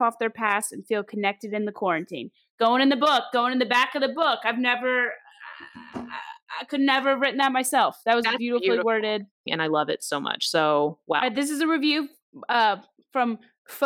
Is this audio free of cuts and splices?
no; 1 cut; at 9.5 s

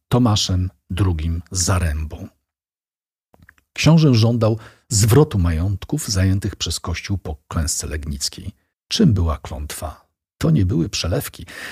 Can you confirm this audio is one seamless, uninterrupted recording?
no; 1 cut; at 8.7 s

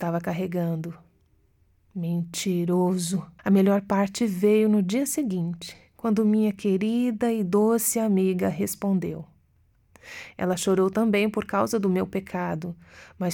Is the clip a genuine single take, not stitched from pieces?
no; 2 cuts; at 3.4 s, 10.3 s

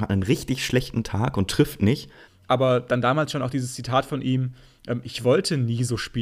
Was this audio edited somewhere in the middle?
yes; 1 cut; at 2.3 s

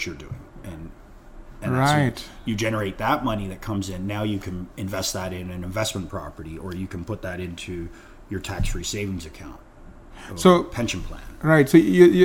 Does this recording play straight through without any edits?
yes; 0 cuts

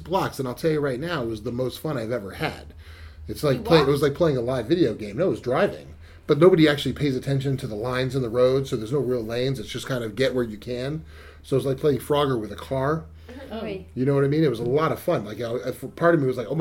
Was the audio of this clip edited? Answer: no; 0 cuts

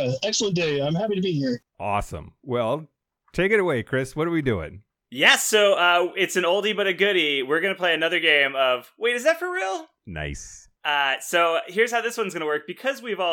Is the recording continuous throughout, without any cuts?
yes; 0 cuts

